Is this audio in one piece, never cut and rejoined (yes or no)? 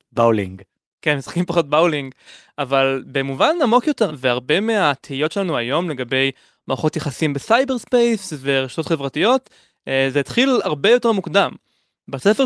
no